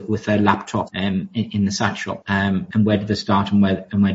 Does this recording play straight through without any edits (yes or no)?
yes